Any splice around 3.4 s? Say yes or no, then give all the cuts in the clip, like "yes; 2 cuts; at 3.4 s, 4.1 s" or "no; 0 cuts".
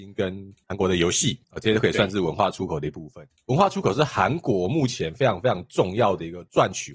no; 0 cuts